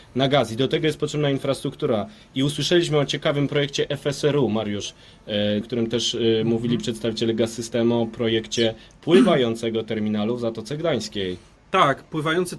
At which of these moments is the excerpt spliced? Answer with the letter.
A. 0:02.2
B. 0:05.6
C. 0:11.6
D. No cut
B